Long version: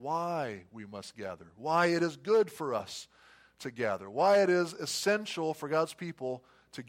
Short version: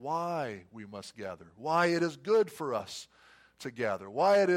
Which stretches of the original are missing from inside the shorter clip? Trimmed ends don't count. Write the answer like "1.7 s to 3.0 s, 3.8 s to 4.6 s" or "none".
none